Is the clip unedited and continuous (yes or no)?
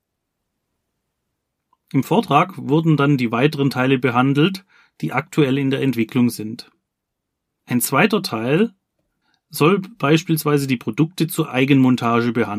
yes